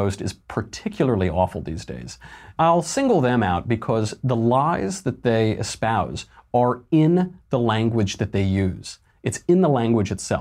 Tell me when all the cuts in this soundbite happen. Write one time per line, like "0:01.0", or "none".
0:02.6